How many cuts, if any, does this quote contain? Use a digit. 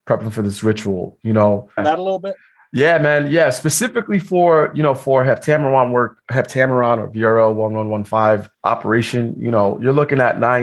2